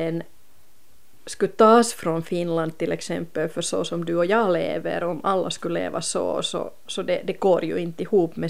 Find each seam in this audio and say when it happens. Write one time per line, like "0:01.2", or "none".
none